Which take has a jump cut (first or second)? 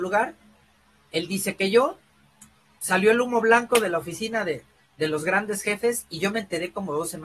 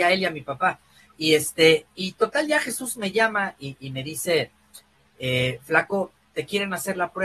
first